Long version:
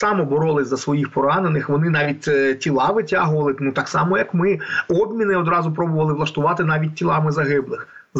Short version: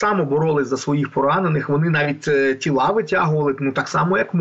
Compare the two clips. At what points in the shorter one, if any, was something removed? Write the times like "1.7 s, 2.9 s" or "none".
none

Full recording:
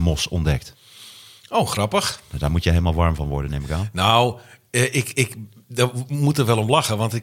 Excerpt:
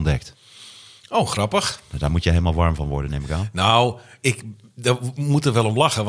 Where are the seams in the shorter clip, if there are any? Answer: 4.2 s

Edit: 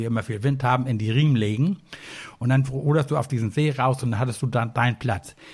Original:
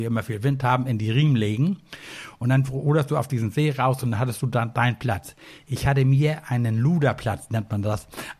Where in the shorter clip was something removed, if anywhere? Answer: none

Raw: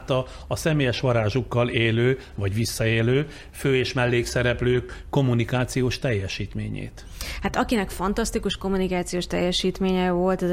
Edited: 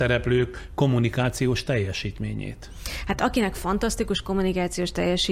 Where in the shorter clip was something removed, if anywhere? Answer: none

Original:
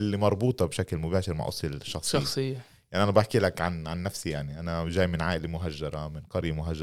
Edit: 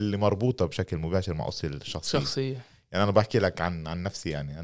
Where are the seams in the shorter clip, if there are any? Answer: none

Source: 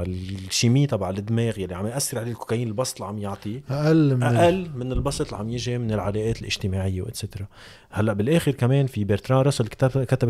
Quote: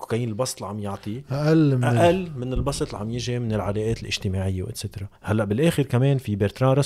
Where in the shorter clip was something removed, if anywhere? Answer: 5.2 s

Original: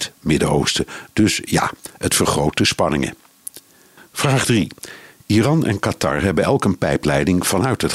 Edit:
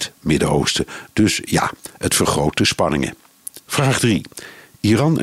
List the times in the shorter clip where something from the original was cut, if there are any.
3.6 s

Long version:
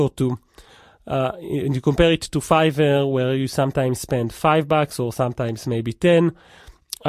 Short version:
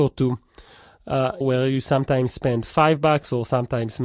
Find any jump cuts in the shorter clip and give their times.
1.4 s

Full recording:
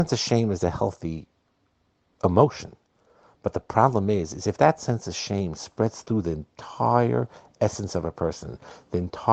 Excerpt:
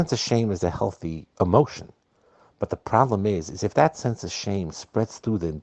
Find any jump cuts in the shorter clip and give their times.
1.3 s

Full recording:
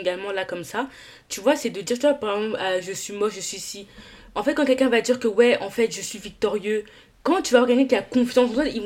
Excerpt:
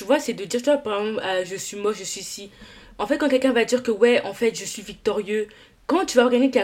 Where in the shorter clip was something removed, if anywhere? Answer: none

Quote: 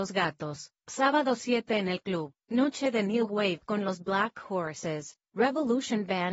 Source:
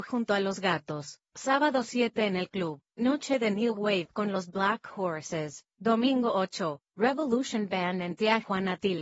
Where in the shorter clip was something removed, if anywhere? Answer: 5.2 s

